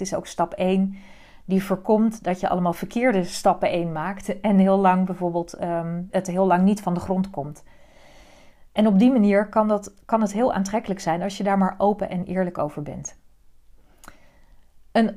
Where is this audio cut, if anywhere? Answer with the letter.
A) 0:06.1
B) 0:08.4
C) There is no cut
A